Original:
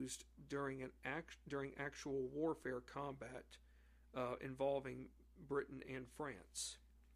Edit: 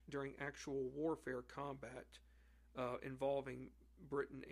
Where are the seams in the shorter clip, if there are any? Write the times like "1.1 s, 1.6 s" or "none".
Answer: none